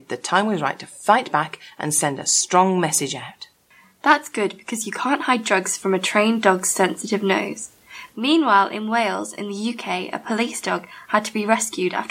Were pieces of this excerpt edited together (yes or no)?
no